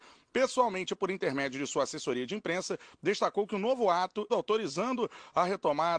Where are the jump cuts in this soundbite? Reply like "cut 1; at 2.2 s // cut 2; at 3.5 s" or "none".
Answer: cut 1; at 4.3 s